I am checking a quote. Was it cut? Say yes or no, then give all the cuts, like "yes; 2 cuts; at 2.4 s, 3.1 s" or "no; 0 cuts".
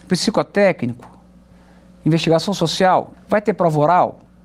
yes; 1 cut; at 3.1 s